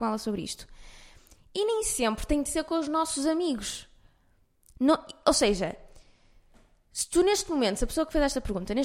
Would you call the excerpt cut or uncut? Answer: uncut